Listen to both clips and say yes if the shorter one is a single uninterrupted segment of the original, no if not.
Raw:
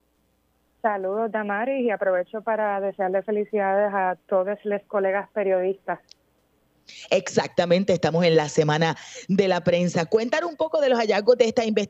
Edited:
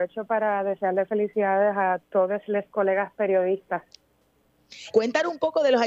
no